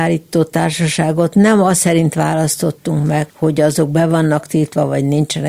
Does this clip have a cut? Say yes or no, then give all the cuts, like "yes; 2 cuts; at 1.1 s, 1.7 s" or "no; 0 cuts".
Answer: yes; 1 cut; at 3.3 s